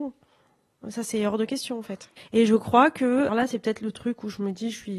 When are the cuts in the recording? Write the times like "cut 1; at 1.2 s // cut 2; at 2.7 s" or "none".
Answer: cut 1; at 2.2 s // cut 2; at 3.3 s